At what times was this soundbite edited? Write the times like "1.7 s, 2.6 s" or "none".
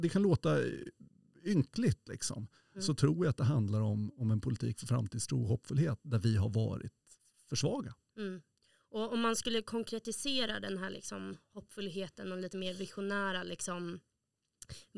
2.7 s